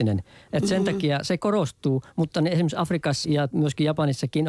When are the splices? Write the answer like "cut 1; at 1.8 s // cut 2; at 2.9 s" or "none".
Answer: cut 1; at 3.2 s